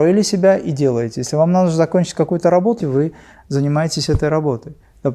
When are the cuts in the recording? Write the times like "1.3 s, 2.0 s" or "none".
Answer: 2.8 s